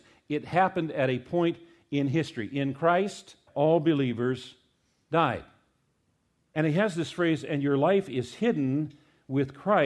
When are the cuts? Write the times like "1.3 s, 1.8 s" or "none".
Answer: 3.5 s